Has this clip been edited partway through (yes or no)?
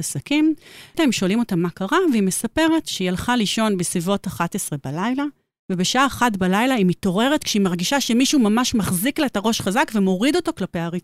yes